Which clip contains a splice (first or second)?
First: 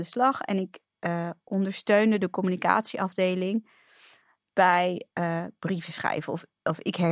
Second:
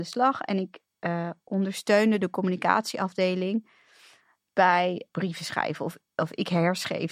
second